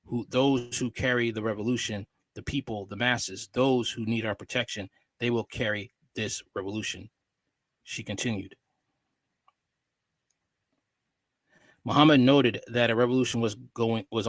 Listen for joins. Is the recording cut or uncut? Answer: uncut